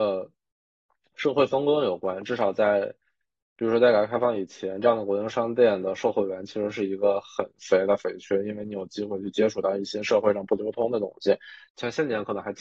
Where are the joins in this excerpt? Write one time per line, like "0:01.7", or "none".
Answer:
0:11.7